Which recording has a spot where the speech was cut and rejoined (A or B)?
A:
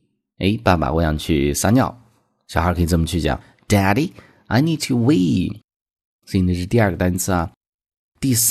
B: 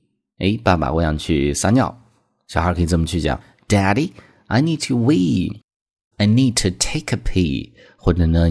B